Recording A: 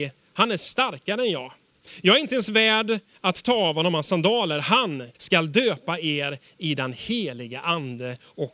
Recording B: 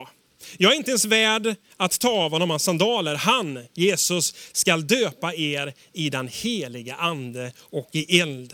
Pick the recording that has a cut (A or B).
A